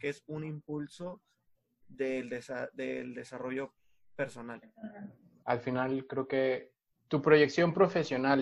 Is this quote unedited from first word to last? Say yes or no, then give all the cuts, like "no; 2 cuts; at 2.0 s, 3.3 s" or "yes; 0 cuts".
no; 2 cuts; at 5.4 s, 7.0 s